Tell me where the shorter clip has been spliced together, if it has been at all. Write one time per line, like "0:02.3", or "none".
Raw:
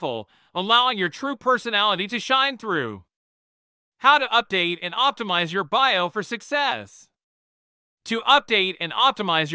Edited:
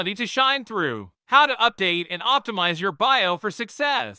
0:01.2